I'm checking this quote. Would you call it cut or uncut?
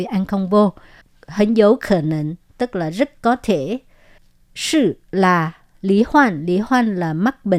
uncut